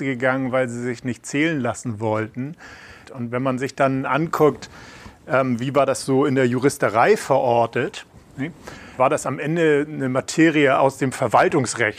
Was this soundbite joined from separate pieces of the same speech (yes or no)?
yes